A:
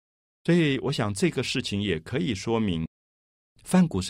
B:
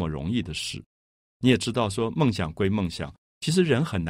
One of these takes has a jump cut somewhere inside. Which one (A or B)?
B